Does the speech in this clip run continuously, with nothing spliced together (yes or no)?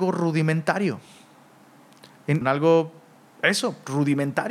no